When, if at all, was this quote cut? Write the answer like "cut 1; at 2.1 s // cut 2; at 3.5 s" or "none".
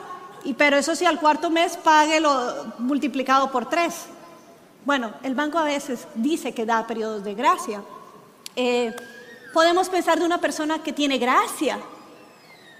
none